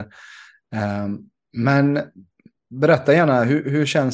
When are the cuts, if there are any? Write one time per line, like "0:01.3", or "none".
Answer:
none